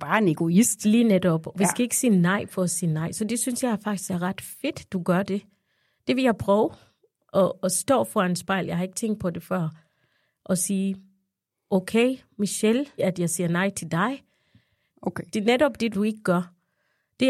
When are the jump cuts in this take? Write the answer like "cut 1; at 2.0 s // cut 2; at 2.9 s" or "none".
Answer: cut 1; at 13.0 s // cut 2; at 14.9 s // cut 3; at 15.9 s